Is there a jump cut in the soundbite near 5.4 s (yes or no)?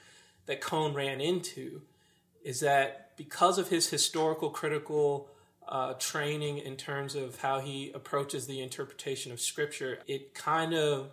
no